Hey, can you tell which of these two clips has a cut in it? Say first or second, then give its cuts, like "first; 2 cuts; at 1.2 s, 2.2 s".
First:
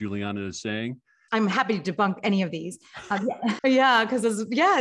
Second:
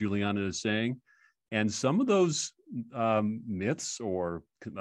first; 2 cuts; at 1.3 s, 3.6 s